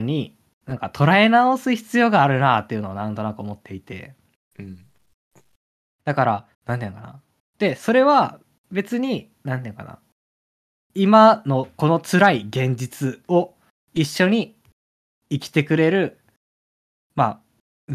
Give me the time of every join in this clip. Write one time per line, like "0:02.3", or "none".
0:06.5